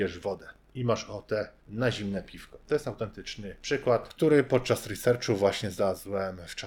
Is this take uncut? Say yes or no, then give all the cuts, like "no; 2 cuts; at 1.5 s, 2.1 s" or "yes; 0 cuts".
no; 2 cuts; at 1.6 s, 3.6 s